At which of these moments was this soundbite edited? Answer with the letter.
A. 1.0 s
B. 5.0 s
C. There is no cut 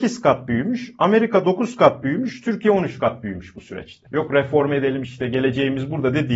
B